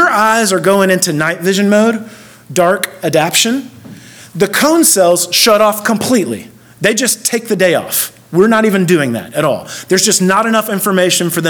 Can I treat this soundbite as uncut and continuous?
yes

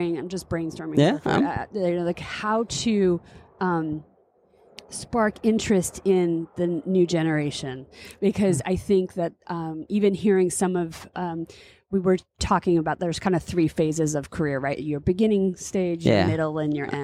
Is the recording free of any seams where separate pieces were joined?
yes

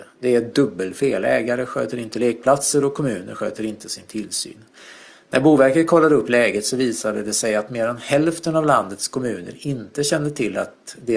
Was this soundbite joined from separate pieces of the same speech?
no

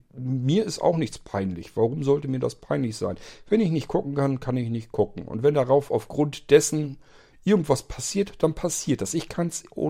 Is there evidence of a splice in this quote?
no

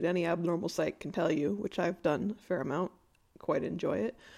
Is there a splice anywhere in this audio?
no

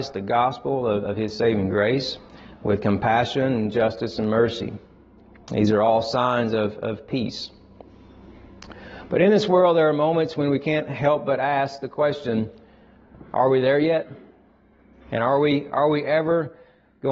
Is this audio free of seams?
yes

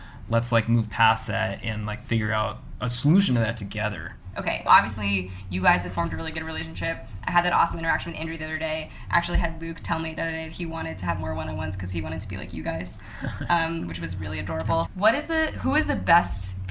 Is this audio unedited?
no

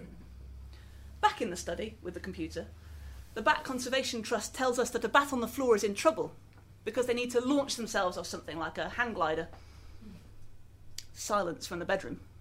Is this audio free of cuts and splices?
yes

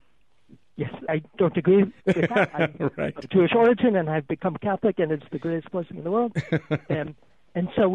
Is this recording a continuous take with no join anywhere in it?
no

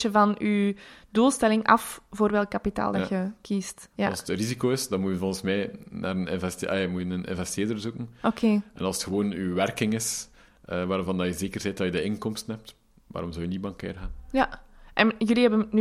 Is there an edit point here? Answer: no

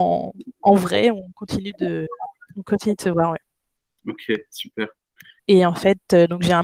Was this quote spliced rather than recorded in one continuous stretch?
yes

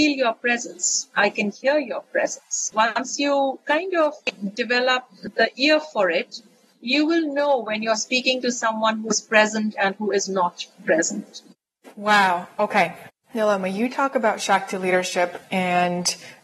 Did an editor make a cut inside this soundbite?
yes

